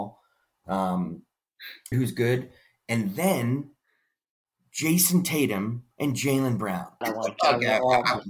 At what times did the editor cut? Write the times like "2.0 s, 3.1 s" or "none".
1.9 s, 7.0 s